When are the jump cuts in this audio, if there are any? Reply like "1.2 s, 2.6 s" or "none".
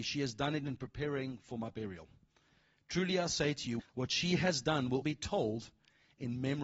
3.8 s, 5.0 s